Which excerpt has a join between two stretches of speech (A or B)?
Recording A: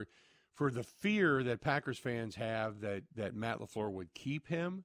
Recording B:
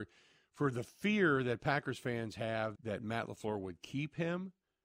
B